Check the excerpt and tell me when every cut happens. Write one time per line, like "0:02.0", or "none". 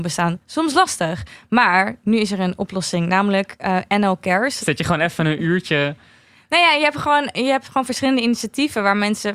0:04.6